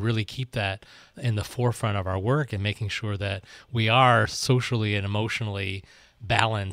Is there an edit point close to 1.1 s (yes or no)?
yes